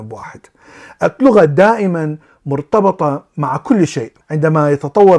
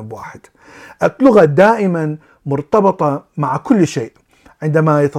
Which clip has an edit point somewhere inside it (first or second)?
first